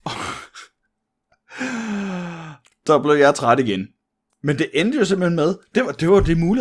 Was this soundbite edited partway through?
yes; 1 cut; at 4.3 s

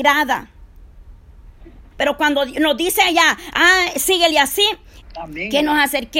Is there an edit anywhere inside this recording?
yes; 2 cuts; at 1.9 s, 5.0 s

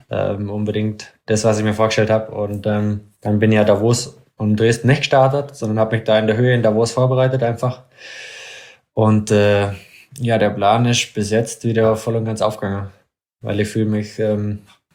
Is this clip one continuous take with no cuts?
no; 1 cut; at 3.2 s

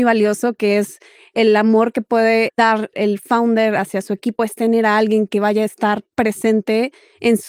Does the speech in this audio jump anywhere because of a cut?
no; 0 cuts

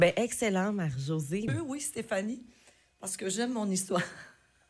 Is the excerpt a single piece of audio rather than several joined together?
no; 1 cut; at 1.5 s

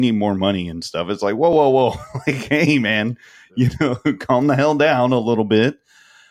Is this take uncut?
yes; 0 cuts

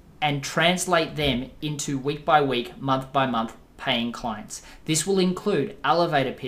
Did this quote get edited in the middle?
no; 0 cuts

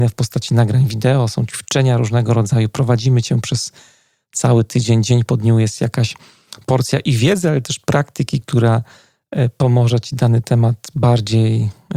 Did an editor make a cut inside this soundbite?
no; 0 cuts

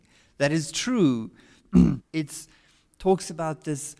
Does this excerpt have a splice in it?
yes; 1 cut; at 2.0 s

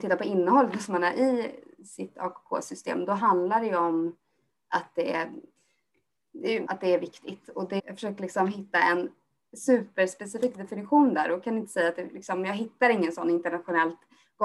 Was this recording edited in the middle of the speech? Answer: yes; 2 cuts; at 6.7 s, 7.8 s

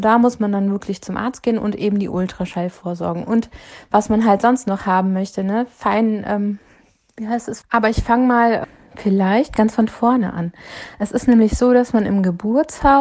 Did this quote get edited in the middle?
yes; 1 cut; at 7.6 s

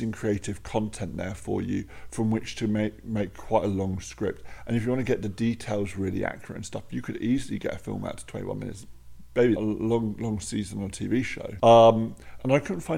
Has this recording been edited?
yes; 2 cuts; at 9.6 s, 11.6 s

